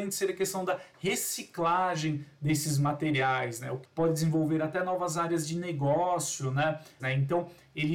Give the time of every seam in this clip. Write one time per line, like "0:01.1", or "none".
0:03.8
0:07.0